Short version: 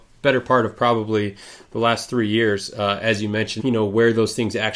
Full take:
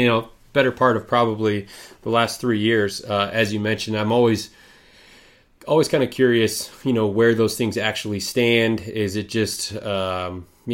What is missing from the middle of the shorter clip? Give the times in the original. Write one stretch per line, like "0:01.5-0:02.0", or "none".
0:03.9-0:06.8